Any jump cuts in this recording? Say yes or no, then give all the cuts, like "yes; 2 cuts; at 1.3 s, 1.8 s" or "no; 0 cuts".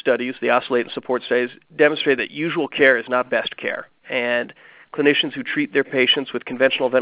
yes; 1 cut; at 3.2 s